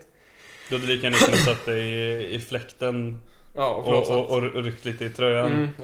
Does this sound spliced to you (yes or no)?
no